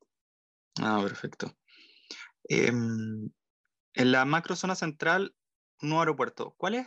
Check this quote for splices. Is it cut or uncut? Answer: uncut